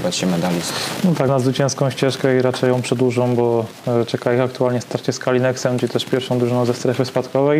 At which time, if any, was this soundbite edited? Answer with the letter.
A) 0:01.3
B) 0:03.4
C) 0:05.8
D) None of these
A